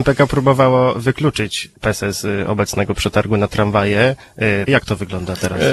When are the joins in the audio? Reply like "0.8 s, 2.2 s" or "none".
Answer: 1.8 s, 4.7 s